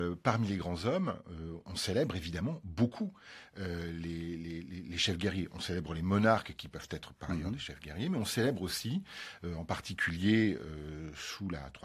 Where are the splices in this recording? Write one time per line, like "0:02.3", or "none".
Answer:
none